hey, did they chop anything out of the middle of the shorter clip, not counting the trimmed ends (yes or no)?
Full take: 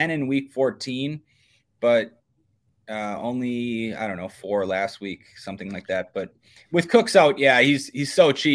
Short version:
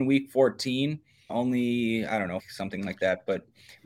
yes